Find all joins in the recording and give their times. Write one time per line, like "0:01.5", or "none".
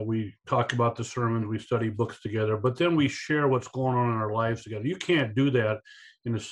none